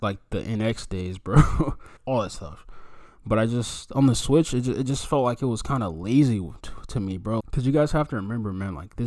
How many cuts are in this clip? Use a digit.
2